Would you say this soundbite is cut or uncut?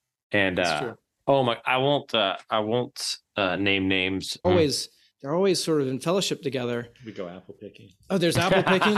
cut